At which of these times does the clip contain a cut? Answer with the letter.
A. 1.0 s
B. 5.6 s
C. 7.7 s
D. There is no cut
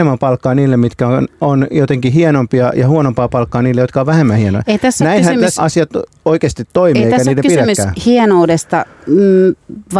B